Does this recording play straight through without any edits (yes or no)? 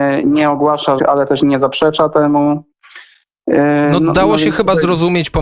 no